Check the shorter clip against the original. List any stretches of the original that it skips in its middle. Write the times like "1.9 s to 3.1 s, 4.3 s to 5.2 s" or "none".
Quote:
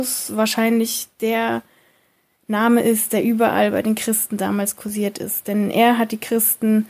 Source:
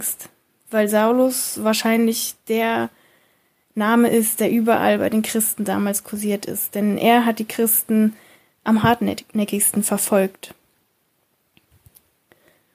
none